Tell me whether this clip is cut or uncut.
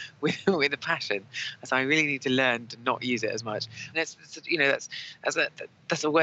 cut